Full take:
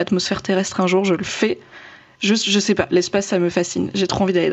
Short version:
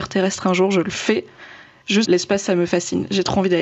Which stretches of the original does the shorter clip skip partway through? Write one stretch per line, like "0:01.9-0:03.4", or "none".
0:02.4-0:02.9

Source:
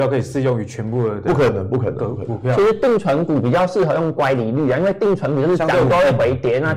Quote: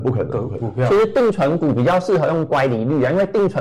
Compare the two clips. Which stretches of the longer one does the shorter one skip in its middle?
none

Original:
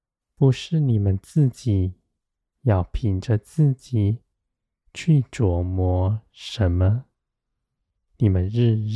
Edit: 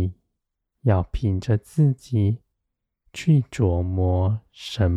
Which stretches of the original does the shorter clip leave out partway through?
none

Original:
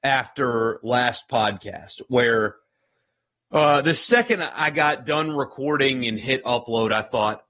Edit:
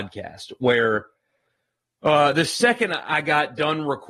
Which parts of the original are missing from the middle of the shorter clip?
none

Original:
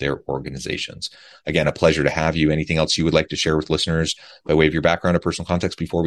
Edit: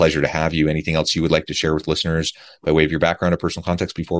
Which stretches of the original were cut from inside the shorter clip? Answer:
none

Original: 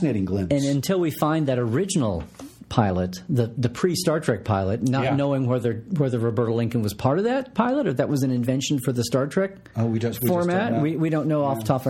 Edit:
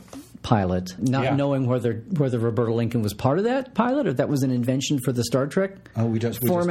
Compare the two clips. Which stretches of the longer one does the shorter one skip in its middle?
0:03.2-0:04.8

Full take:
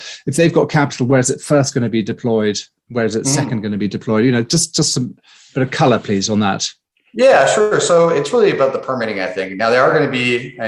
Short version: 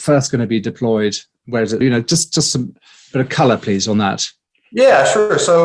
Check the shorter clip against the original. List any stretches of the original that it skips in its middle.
0:03.2-0:04.2

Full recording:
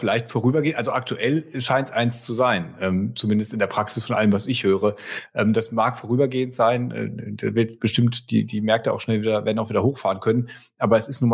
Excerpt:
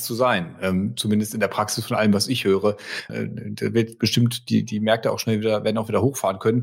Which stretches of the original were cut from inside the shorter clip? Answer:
0:05.3-0:06.9

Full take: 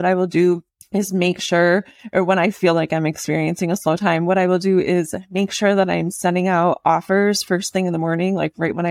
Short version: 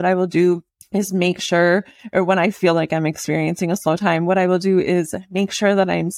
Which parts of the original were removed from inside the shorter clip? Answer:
none

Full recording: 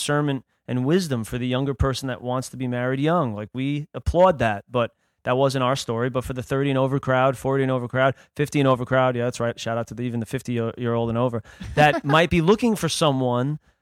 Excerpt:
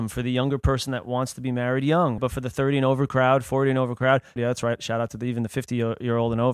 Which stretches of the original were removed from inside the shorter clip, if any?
0:03.3-0:06.1
0:08.3-0:09.1

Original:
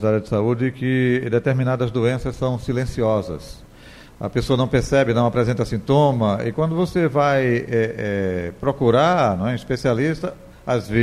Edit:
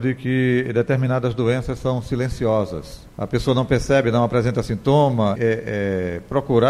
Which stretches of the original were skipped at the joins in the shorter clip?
0:03.7-0:04.2
0:06.4-0:07.7

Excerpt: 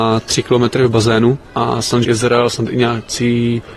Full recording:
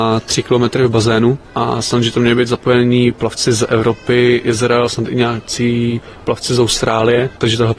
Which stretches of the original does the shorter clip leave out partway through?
0:02.0-0:04.4

